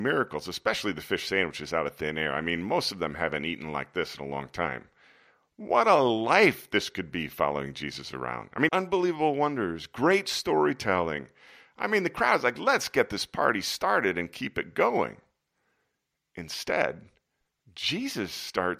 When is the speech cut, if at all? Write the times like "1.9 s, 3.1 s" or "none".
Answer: 8.7 s

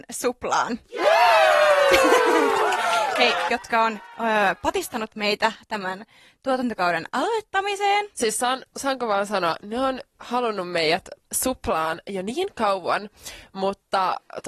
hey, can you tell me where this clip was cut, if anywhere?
3.5 s

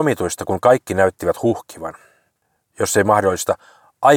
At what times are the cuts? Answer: none

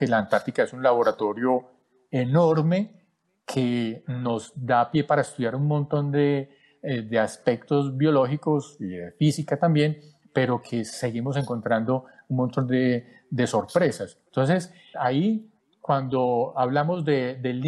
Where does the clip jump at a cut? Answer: 14.9 s

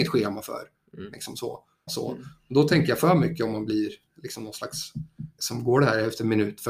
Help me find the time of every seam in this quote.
1.9 s, 5.4 s

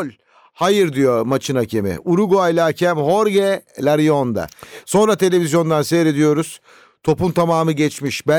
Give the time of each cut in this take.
none

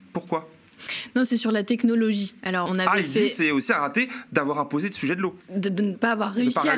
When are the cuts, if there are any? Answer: 2.7 s, 5.4 s

